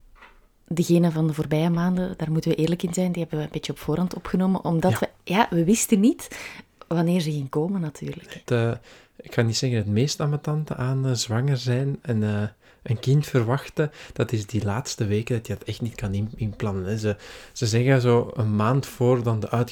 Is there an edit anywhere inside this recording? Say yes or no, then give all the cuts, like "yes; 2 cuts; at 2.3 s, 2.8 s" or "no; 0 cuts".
yes; 1 cut; at 8.5 s